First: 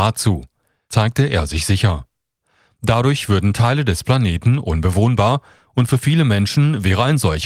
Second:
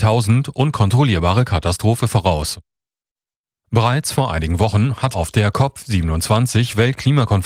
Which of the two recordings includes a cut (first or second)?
second